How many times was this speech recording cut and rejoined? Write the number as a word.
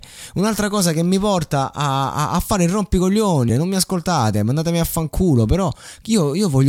one